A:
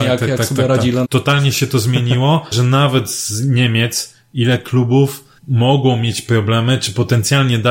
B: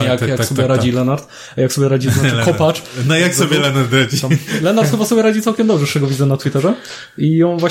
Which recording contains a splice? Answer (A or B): A